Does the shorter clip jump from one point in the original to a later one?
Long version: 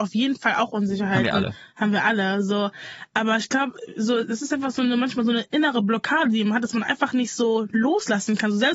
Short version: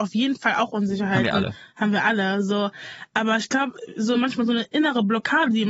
yes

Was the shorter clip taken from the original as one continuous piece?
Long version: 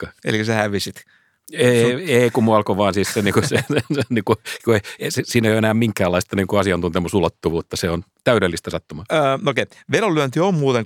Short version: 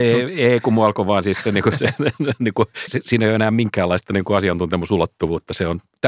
no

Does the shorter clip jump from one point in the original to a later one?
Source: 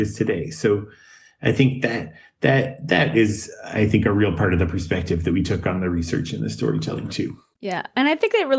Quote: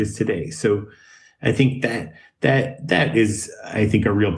no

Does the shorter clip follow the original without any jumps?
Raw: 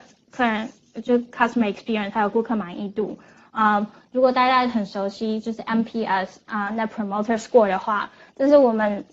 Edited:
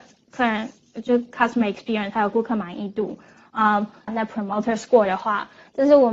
no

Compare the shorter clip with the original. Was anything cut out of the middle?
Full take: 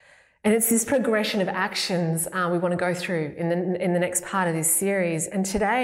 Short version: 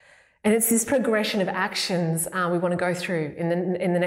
no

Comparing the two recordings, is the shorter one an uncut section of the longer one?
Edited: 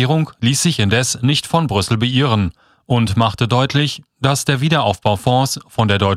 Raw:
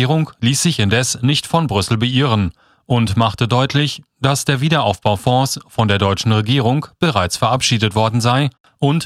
yes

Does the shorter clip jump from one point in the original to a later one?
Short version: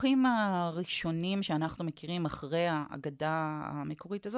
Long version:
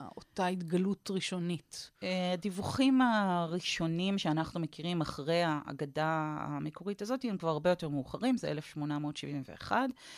no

